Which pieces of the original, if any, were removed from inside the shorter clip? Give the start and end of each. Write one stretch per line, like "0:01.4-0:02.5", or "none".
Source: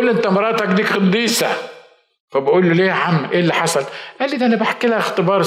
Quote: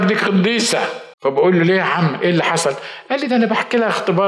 0:01.8-0:02.2